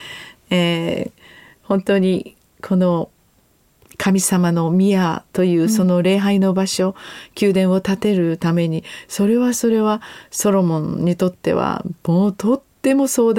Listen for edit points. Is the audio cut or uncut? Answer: uncut